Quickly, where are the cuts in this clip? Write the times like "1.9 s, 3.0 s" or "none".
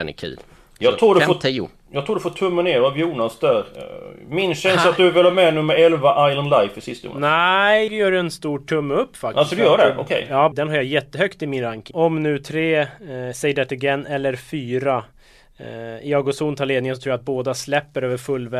7.9 s, 10.5 s, 11.9 s